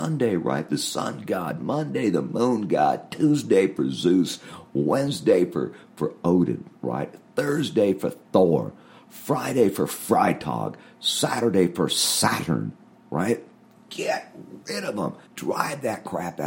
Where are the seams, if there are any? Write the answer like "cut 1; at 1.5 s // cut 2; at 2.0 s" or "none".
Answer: cut 1; at 15.3 s